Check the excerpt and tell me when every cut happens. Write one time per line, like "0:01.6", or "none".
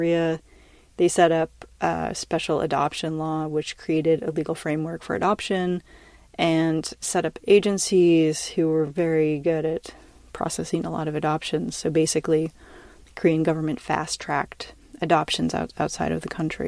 none